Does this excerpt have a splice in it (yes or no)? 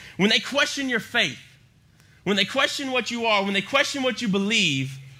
no